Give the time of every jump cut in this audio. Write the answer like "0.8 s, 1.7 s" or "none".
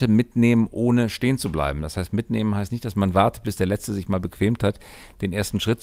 none